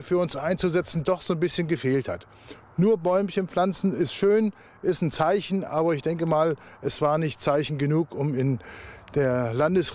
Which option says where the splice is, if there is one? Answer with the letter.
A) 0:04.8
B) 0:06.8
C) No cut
C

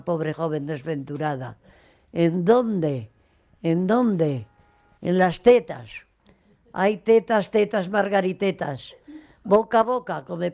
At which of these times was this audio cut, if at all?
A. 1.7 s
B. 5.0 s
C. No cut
B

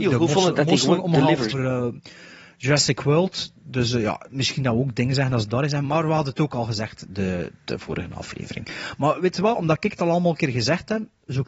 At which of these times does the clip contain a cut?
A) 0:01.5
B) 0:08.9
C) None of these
A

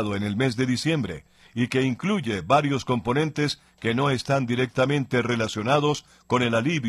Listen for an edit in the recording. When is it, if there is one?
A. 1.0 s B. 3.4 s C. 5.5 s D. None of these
D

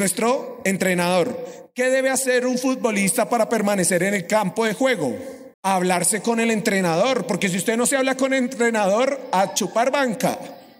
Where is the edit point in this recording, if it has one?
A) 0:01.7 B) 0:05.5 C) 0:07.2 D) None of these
B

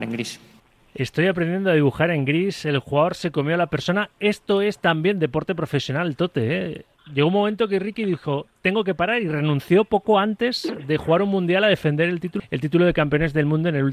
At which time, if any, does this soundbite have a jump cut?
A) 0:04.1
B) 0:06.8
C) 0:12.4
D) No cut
C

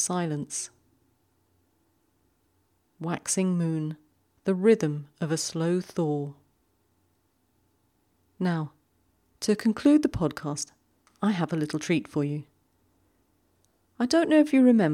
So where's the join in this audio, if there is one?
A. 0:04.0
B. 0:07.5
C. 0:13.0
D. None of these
D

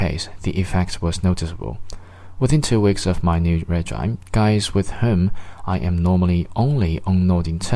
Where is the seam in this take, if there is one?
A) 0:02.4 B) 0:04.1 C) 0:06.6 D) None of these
D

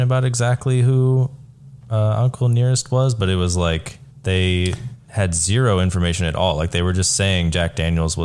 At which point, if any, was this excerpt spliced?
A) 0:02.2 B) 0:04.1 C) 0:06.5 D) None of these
B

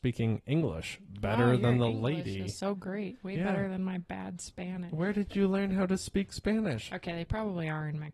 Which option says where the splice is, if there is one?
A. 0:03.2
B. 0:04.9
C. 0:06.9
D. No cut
C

